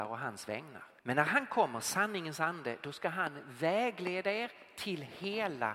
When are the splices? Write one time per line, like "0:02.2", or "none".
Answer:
0:01.0